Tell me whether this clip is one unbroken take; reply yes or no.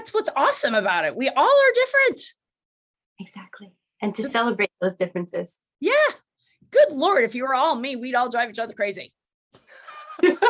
yes